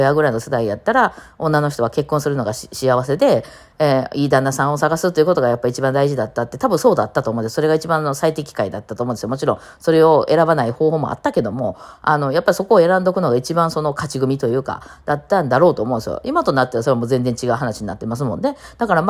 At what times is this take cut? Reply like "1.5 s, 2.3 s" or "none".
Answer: none